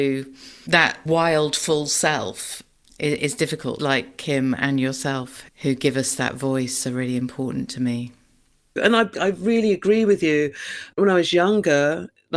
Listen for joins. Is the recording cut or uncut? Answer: cut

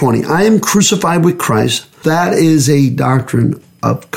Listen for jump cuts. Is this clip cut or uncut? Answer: cut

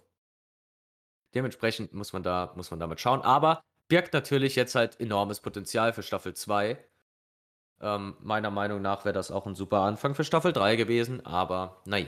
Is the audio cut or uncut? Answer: uncut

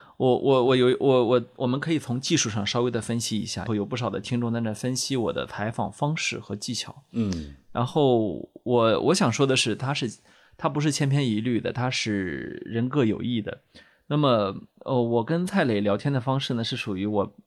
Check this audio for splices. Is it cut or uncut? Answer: cut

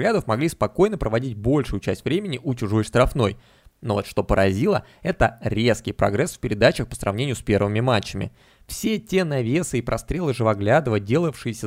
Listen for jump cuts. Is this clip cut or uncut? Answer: uncut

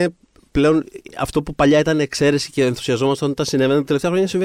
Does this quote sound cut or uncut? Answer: uncut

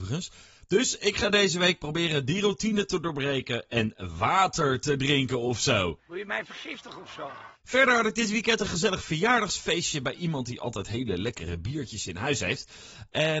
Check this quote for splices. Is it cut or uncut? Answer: cut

